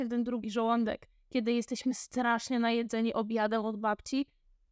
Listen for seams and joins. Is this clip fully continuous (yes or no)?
yes